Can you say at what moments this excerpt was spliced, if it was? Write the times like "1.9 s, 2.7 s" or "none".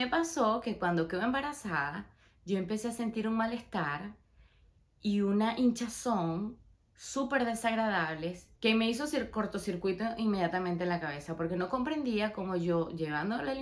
8.6 s